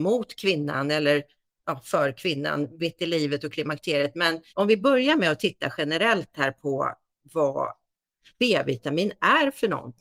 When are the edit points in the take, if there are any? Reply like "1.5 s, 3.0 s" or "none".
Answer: 4.5 s